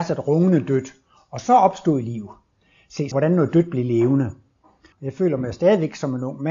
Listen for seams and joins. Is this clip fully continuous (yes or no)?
no